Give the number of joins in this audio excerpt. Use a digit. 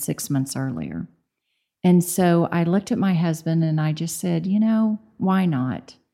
0